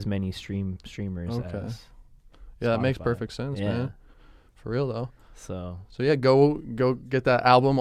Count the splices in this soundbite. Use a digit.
0